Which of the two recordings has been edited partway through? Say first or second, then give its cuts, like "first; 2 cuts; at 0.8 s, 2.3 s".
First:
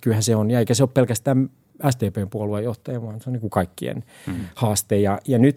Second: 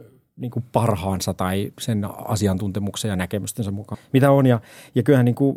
second; 2 cuts; at 1.7 s, 3.9 s